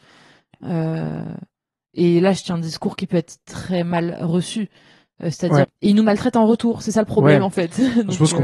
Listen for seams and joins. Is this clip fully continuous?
no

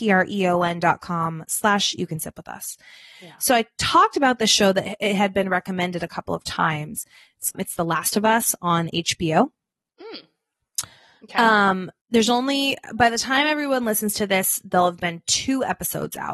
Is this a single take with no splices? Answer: no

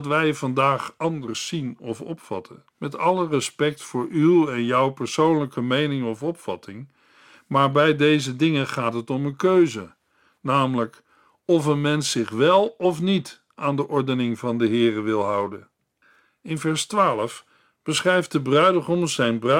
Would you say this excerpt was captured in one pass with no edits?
no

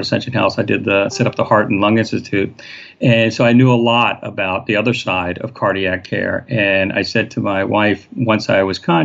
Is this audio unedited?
yes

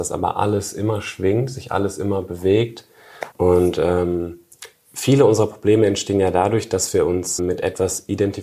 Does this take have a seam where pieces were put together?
yes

